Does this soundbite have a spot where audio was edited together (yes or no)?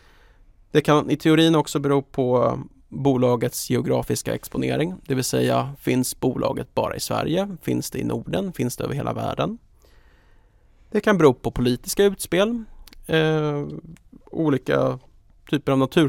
no